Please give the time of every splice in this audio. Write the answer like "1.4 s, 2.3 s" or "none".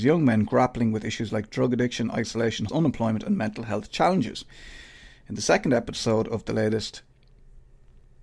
2.7 s